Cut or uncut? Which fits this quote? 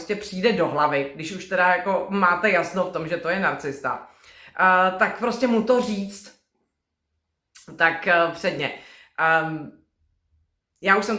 uncut